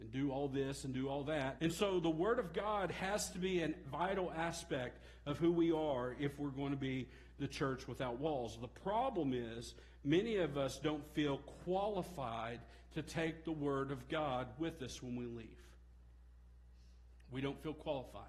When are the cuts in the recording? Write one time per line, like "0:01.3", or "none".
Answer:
0:01.6